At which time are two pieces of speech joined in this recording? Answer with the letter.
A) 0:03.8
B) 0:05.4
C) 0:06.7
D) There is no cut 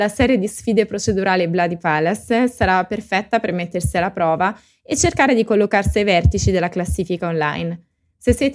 D